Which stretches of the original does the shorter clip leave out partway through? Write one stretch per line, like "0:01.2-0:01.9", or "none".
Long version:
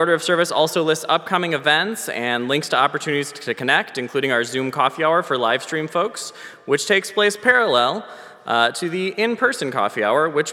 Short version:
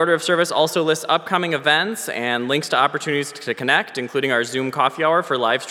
none